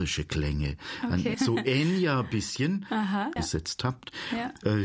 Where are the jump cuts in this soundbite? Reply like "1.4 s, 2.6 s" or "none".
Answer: 1.3 s, 3.4 s